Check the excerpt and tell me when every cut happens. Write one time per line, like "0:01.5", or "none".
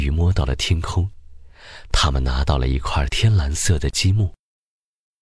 none